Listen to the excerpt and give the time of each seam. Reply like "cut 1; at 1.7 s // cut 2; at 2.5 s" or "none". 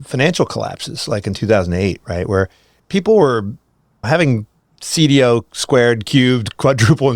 none